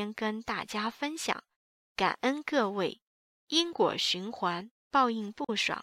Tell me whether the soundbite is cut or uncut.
uncut